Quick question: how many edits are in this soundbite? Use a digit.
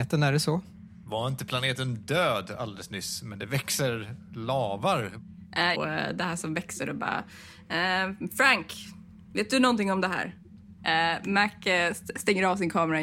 2